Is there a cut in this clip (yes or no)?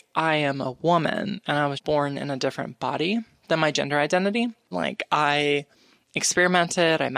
yes